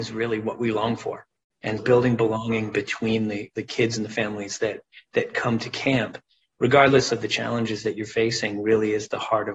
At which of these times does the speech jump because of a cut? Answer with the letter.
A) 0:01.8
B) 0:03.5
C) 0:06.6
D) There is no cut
A